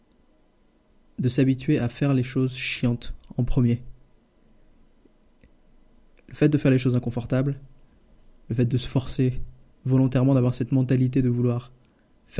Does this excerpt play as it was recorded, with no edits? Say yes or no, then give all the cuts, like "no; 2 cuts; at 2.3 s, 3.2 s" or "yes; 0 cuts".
yes; 0 cuts